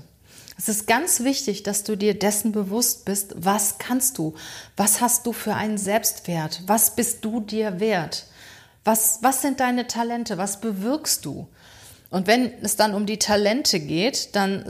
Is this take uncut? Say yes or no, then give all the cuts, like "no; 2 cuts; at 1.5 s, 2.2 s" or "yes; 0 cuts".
yes; 0 cuts